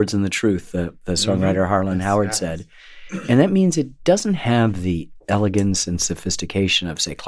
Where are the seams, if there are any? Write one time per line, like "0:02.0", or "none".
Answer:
none